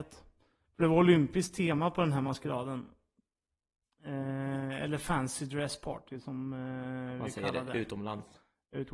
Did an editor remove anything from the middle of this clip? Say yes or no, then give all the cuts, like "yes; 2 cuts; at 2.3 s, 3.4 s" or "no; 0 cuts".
no; 0 cuts